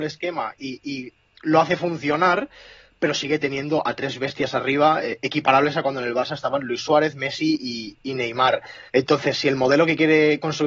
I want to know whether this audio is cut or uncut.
cut